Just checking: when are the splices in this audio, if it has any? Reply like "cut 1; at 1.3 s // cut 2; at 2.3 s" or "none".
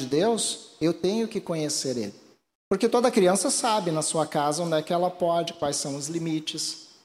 cut 1; at 2.5 s